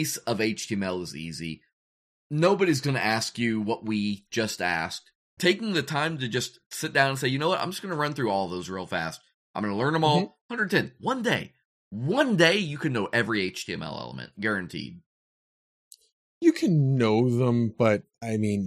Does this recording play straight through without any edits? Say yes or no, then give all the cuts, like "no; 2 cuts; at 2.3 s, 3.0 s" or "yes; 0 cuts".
no; 1 cut; at 5.4 s